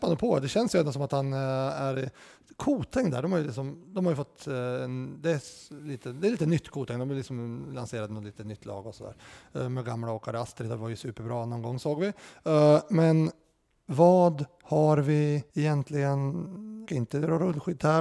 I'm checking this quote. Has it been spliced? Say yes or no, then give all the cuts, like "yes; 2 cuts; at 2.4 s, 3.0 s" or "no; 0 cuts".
yes; 2 cuts; at 15.5 s, 16.8 s